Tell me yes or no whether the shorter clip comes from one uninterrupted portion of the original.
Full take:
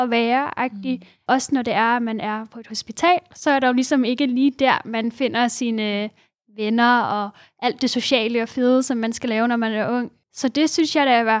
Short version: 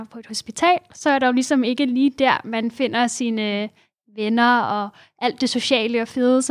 yes